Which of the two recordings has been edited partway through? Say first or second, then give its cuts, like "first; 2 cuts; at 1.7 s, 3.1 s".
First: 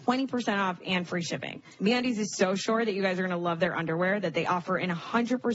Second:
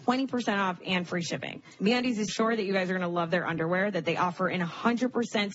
second; 1 cut; at 2.3 s